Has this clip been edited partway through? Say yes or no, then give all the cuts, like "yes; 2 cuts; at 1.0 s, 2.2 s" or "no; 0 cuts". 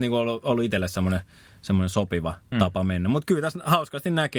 no; 0 cuts